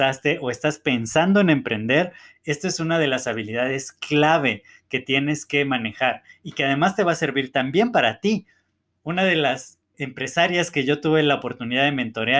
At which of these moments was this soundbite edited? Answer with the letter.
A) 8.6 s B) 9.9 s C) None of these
B